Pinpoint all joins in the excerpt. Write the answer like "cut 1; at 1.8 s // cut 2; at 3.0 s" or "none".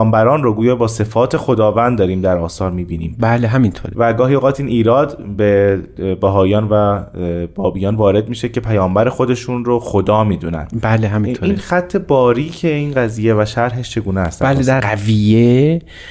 cut 1; at 14.8 s